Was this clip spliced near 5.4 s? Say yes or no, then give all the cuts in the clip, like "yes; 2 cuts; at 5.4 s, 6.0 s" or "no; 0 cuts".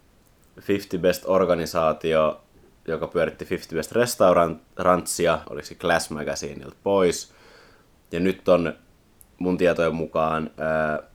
yes; 1 cut; at 5.4 s